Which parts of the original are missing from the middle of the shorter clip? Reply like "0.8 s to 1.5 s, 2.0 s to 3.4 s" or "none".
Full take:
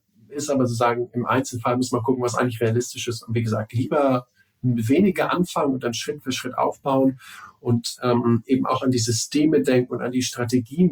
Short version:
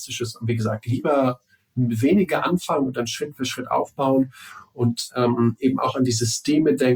none